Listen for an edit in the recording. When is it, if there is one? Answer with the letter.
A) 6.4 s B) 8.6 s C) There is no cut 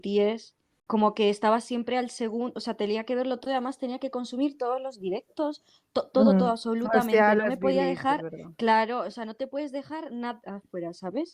C